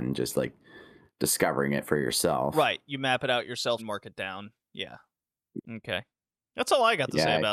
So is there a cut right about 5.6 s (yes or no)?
yes